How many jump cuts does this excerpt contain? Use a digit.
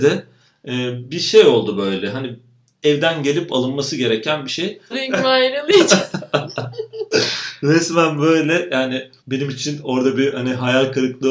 2